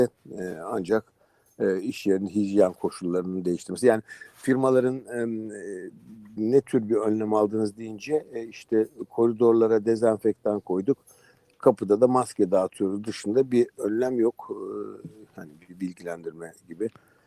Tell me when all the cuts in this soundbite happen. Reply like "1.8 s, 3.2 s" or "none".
6.4 s